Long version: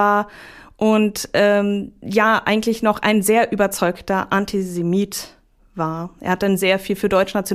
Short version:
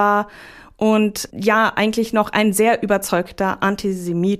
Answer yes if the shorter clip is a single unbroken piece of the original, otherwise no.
no